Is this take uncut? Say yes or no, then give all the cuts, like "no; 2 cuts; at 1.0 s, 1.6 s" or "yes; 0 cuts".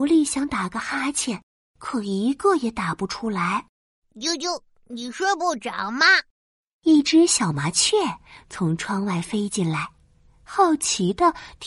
yes; 0 cuts